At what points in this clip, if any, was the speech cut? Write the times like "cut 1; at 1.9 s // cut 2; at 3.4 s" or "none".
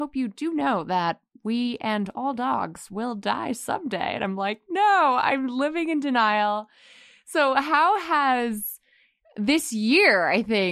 none